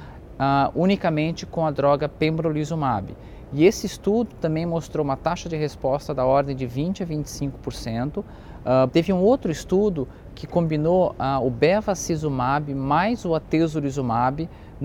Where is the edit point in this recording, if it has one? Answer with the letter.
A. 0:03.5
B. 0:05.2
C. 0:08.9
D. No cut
C